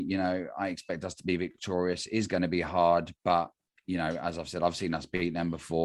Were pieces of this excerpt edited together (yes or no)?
no